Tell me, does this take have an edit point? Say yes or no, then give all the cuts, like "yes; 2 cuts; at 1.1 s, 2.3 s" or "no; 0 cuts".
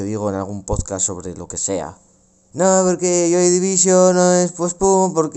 no; 0 cuts